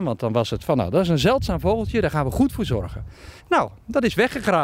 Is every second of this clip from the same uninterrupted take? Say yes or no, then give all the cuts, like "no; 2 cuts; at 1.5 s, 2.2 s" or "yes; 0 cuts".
no; 1 cut; at 3.4 s